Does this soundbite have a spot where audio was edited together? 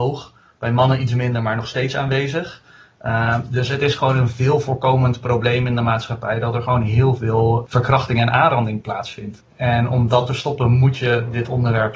no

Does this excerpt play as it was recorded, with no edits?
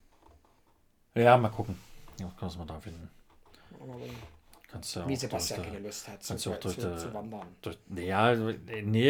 yes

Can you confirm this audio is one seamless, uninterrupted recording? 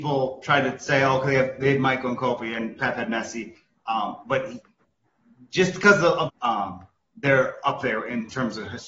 no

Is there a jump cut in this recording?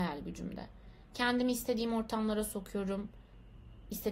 no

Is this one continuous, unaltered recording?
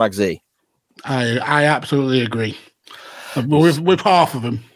yes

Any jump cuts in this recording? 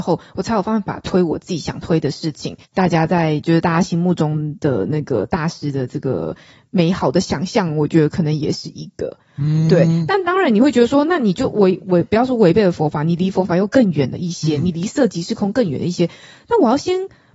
yes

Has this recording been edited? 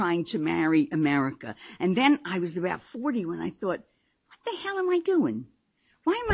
no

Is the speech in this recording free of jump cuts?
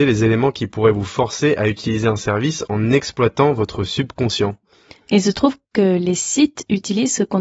yes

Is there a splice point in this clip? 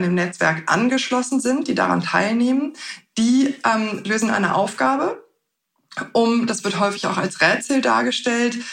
no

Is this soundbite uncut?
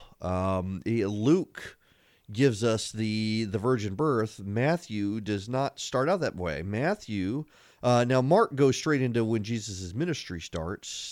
yes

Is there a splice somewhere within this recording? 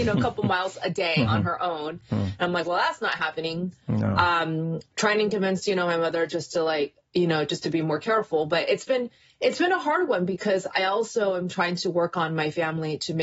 no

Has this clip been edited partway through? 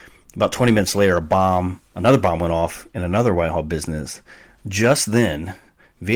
yes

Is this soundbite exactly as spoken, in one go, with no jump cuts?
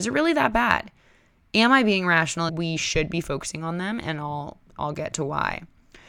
no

